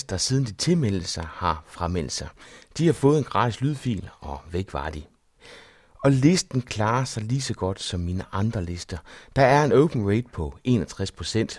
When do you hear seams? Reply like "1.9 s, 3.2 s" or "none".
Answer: none